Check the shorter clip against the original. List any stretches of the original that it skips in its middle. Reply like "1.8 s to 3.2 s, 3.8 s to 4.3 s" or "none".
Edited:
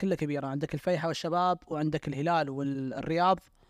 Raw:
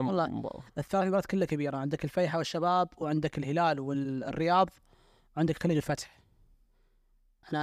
none